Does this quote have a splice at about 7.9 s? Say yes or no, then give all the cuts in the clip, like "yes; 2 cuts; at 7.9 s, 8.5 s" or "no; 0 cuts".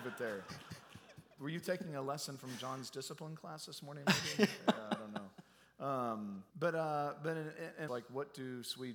yes; 2 cuts; at 6.5 s, 7.9 s